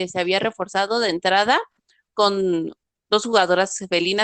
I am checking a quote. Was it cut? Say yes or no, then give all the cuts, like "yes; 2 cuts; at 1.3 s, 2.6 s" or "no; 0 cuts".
no; 0 cuts